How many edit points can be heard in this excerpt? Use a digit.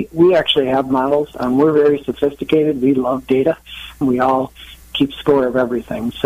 1